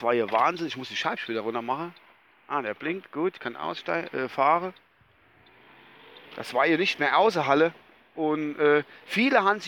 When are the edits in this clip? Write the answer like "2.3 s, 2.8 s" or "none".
6.3 s